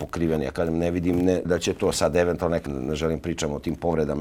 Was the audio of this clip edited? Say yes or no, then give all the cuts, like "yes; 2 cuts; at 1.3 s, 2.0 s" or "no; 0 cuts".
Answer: yes; 2 cuts; at 1.4 s, 2.7 s